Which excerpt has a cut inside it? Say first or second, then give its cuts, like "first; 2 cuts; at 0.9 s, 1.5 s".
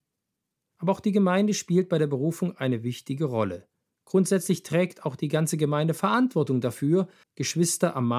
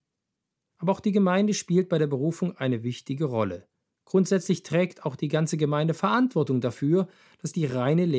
first; 1 cut; at 7.2 s